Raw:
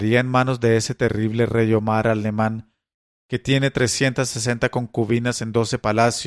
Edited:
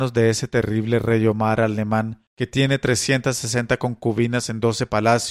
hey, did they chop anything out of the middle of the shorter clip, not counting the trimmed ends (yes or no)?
yes